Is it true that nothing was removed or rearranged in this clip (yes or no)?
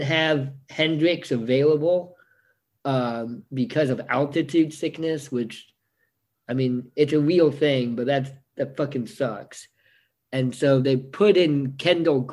yes